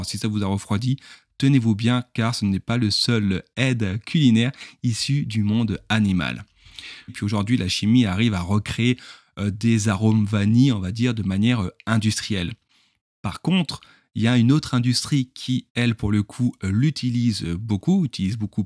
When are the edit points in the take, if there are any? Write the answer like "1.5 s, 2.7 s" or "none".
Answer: 7.1 s